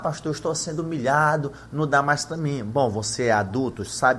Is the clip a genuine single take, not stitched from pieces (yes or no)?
yes